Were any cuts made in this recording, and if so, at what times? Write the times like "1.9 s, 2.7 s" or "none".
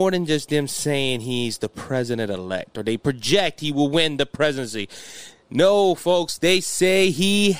none